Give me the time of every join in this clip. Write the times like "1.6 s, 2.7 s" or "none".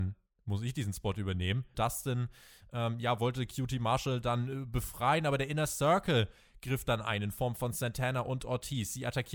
1.7 s